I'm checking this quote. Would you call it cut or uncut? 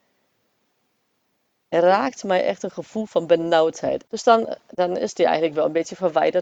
cut